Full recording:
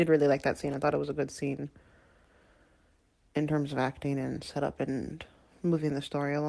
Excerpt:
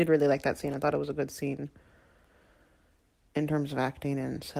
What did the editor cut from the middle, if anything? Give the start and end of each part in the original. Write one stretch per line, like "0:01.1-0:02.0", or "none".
none